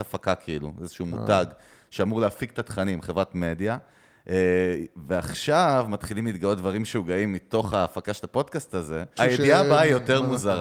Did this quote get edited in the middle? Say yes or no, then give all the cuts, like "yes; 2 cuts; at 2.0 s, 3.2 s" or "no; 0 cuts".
yes; 1 cut; at 9.2 s